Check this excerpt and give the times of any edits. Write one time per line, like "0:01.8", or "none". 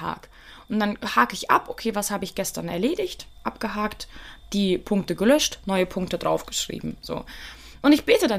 none